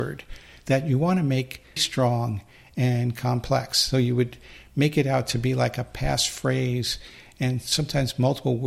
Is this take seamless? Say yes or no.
no